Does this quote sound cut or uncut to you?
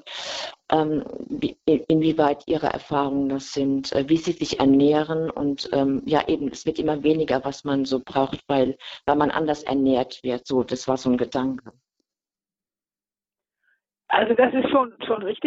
uncut